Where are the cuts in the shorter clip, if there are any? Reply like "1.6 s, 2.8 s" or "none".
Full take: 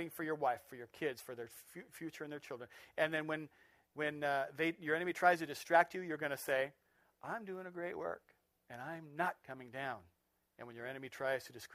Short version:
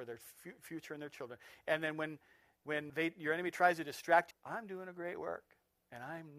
2.9 s, 4.3 s

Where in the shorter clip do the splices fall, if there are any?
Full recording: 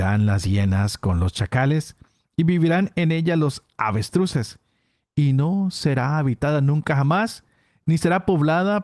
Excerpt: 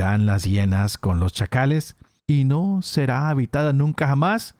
2.2 s

